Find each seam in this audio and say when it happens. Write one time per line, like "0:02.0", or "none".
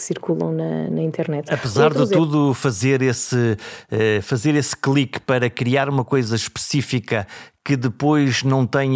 none